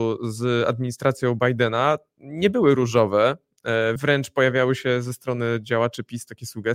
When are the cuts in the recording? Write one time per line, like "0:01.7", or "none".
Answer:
none